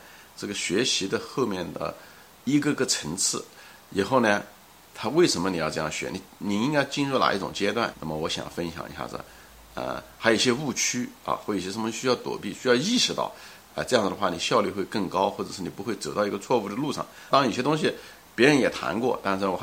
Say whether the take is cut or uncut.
cut